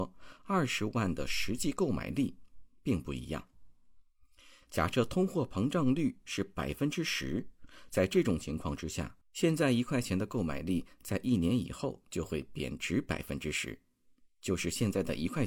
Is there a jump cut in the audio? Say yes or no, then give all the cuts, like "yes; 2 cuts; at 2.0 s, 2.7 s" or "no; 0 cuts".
yes; 2 cuts; at 4.6 s, 9.2 s